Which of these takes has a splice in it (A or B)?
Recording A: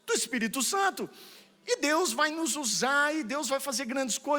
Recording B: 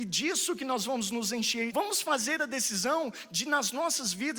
B